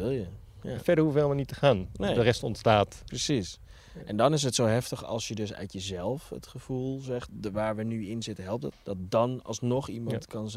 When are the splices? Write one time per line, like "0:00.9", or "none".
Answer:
0:07.3
0:08.7